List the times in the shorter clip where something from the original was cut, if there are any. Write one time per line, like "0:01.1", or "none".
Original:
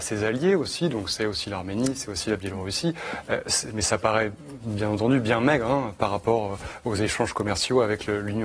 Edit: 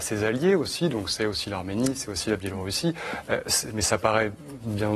none